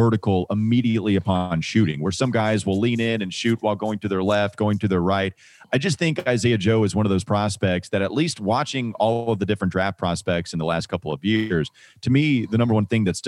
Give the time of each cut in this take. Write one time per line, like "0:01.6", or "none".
none

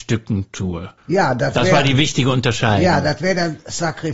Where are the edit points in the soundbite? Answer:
0:01.0

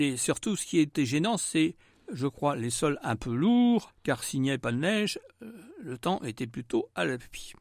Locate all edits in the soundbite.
none

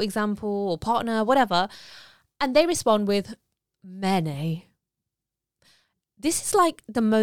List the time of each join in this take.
none

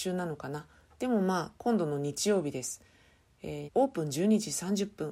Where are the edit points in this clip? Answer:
0:03.7

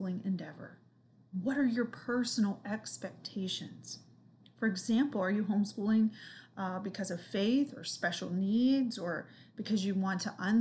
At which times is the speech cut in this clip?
none

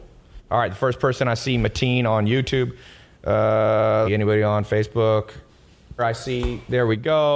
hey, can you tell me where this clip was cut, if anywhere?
0:04.0
0:06.0

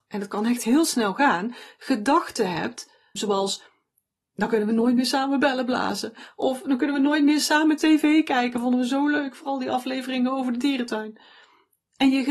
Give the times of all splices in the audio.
0:03.2

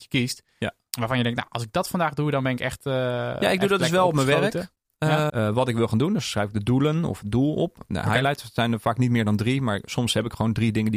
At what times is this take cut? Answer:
0:05.3

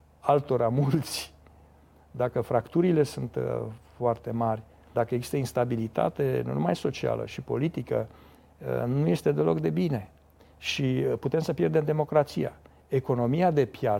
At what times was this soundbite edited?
0:04.9

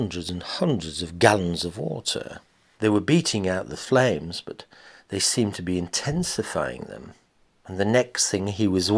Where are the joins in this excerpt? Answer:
0:02.7

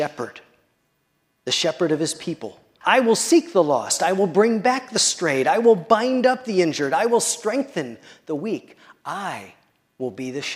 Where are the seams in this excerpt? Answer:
0:02.8

